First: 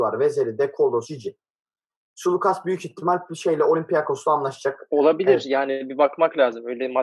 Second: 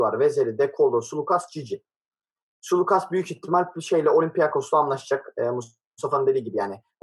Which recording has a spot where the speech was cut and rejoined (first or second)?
first